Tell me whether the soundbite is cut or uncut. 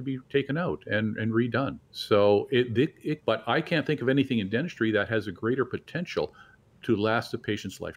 cut